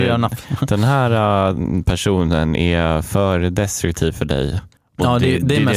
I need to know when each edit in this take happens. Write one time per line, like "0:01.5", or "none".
0:04.8